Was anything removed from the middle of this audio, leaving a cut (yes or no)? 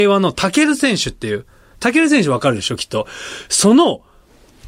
no